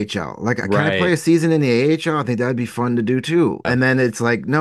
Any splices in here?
yes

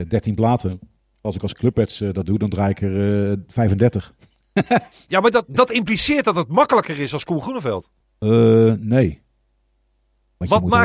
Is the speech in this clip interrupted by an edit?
no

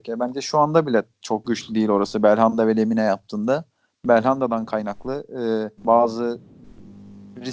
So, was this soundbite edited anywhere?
yes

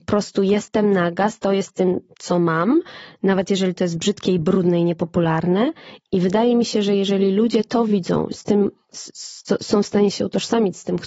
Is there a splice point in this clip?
no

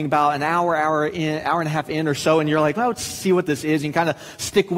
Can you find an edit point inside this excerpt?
no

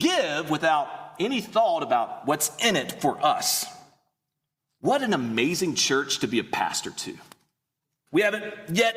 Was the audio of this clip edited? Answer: yes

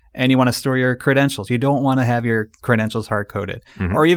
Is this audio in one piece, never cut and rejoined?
yes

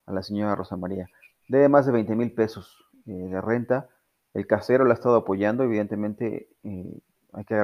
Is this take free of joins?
yes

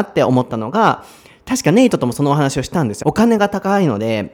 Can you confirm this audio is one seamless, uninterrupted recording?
no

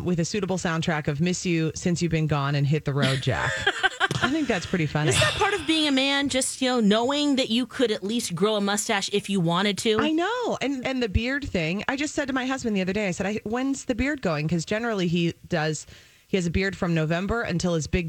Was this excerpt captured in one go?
no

